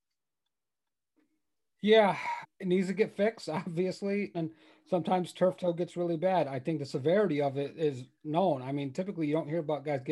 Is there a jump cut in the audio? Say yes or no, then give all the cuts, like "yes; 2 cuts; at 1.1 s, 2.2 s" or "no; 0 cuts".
yes; 2 cuts; at 2.4 s, 4.3 s